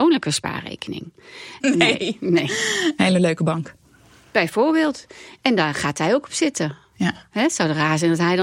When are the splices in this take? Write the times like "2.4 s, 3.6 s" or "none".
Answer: 1.6 s, 3.0 s